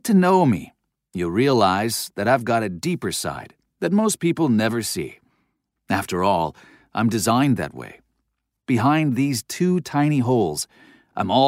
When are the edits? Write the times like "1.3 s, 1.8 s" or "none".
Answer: 5.8 s, 8.5 s